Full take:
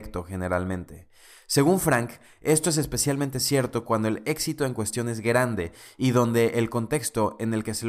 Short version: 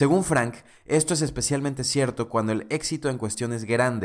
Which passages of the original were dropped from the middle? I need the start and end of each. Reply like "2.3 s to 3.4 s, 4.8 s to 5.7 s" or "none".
none